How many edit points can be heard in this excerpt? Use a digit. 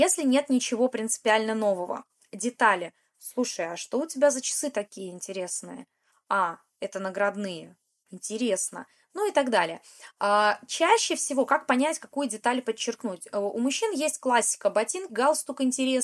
1